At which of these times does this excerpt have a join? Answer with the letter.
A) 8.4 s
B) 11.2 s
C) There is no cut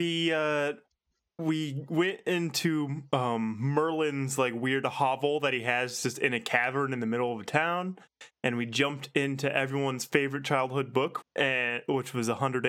B